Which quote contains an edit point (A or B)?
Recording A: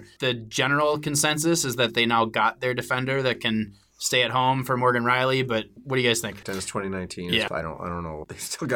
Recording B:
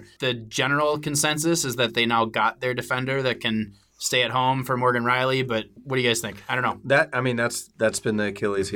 A